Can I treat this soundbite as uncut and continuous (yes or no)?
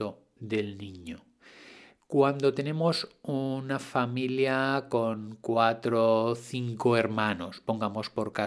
yes